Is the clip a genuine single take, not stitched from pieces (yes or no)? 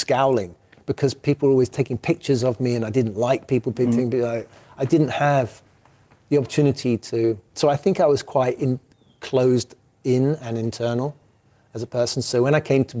yes